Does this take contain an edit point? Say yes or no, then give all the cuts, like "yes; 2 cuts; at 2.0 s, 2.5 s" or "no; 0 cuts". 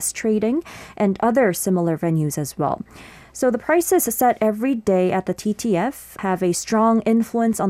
yes; 1 cut; at 6.2 s